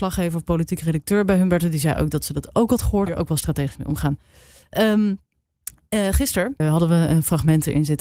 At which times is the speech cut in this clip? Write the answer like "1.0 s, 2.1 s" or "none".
3.1 s, 6.6 s